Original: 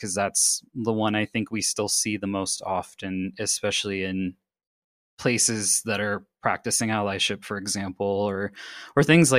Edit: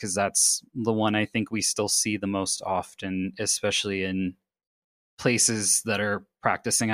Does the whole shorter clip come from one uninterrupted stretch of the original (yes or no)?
yes